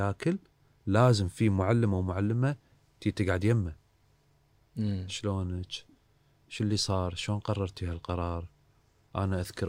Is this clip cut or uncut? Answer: uncut